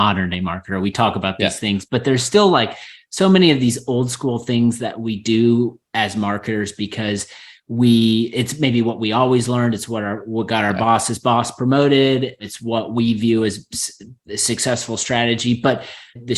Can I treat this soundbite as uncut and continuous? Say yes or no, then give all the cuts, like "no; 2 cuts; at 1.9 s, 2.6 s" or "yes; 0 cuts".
yes; 0 cuts